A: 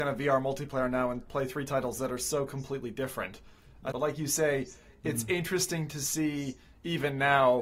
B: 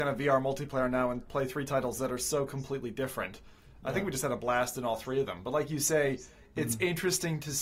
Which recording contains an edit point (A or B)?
A